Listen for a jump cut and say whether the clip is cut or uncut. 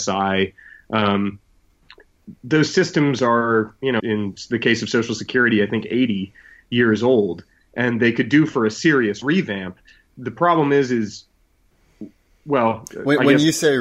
cut